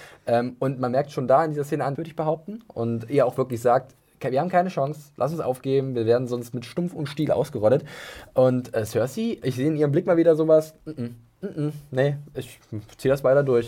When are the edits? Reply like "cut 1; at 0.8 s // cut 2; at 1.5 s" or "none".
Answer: cut 1; at 2.0 s